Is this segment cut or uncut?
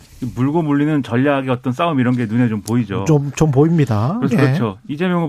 cut